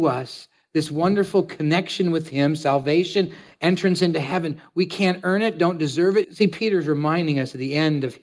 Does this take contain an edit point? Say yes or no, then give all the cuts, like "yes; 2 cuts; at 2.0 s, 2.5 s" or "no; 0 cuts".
yes; 1 cut; at 6.2 s